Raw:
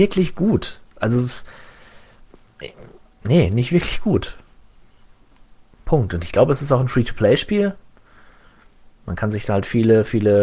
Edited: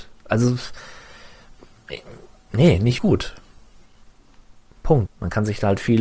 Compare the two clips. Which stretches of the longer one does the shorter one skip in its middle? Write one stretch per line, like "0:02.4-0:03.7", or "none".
0:03.7-0:04.0
0:06.1-0:08.9